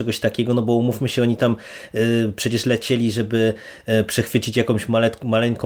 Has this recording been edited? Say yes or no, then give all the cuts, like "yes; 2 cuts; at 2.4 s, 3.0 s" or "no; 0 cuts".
no; 0 cuts